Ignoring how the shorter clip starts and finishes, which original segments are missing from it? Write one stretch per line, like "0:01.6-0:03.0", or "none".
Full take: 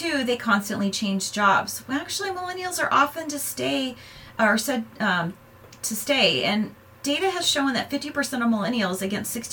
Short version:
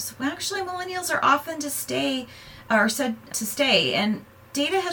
0:05.0-0:05.8